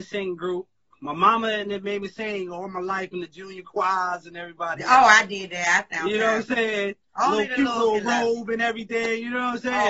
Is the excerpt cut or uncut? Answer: uncut